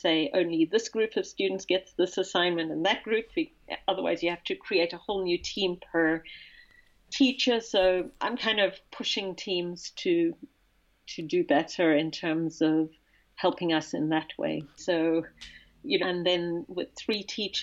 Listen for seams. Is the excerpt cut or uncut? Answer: cut